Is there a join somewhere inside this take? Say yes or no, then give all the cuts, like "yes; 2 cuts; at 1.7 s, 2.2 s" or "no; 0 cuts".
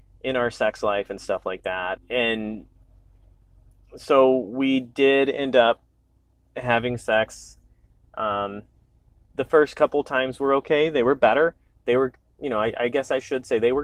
yes; 1 cut; at 2.0 s